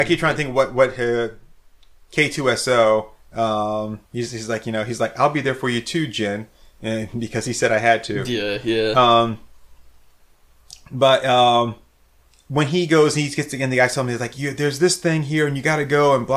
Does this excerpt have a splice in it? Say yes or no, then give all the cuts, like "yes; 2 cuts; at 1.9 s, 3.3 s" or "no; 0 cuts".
yes; 1 cut; at 4.1 s